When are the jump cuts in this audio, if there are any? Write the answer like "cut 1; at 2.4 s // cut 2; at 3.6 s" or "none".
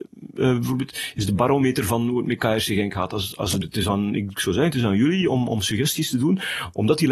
cut 1; at 3.6 s